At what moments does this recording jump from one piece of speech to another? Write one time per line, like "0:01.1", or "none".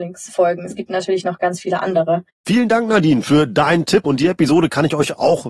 0:02.3